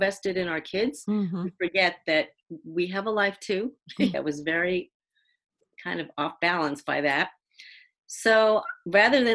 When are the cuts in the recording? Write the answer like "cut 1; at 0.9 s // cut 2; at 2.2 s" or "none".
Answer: cut 1; at 4.1 s